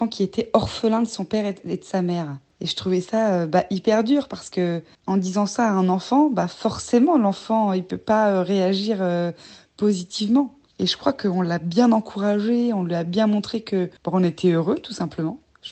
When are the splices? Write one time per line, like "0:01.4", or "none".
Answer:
none